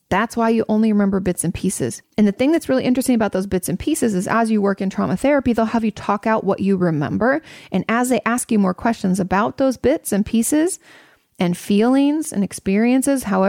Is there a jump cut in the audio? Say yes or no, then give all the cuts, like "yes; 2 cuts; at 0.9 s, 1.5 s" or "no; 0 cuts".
yes; 1 cut; at 2.0 s